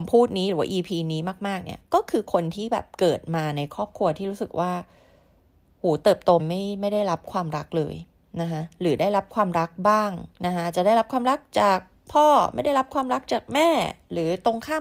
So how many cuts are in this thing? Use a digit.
2